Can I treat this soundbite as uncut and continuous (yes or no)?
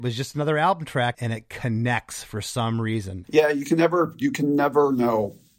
no